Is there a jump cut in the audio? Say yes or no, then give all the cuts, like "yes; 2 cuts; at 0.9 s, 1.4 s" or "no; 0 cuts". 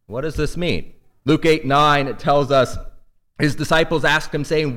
no; 0 cuts